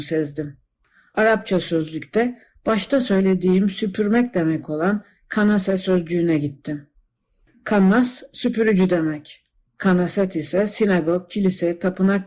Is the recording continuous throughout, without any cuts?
yes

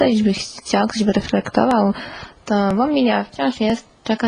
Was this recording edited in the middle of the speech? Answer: no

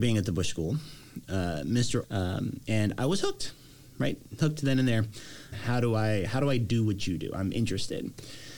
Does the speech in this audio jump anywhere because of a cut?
yes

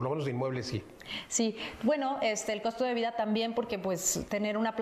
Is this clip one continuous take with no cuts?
yes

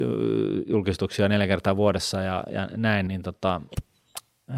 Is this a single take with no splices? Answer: no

